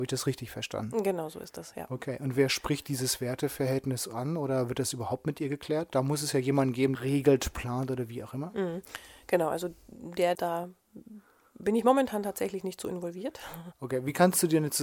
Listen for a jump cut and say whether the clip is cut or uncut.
cut